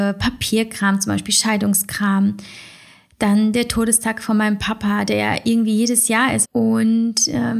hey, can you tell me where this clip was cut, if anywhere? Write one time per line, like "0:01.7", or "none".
0:06.4